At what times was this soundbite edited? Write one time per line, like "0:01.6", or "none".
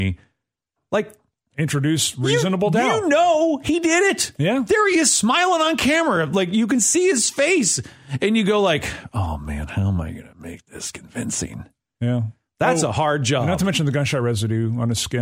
none